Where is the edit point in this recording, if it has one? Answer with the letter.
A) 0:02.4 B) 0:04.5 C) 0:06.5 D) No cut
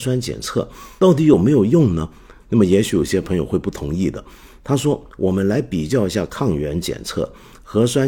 A